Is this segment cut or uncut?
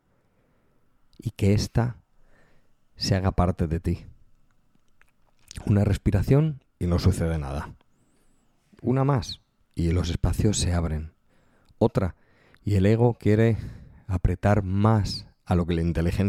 uncut